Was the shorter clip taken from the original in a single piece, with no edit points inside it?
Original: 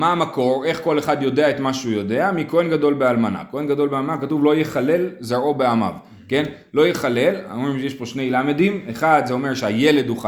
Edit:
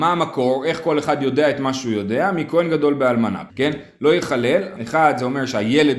no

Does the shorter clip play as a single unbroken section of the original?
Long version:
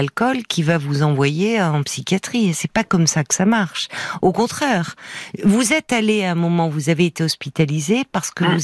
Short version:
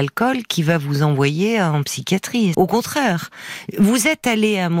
no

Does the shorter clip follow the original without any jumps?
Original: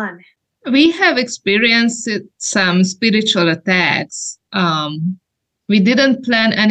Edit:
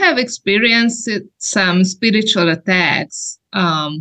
yes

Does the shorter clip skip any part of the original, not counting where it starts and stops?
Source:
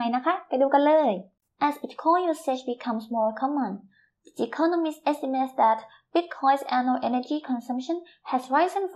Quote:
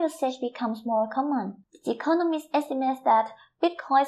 yes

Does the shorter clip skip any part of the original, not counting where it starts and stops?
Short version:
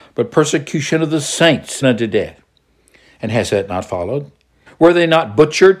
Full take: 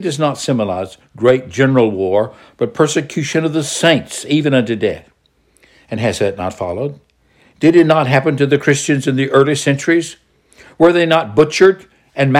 yes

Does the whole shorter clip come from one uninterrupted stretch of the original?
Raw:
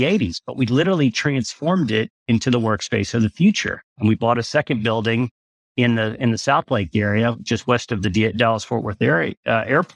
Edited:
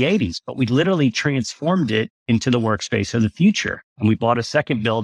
yes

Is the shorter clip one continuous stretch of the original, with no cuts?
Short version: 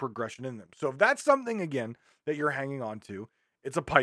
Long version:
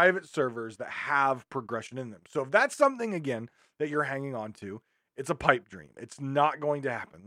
yes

